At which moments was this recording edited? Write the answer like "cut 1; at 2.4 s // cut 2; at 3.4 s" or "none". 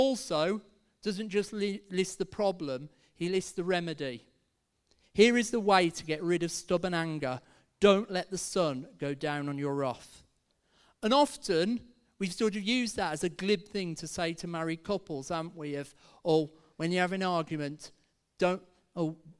none